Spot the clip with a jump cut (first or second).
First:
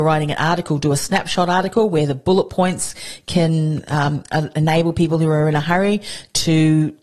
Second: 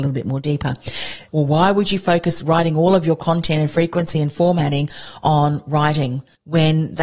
second